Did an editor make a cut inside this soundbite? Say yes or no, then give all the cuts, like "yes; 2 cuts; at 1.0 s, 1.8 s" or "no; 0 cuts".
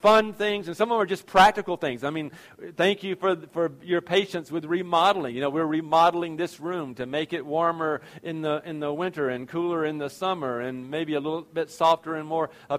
no; 0 cuts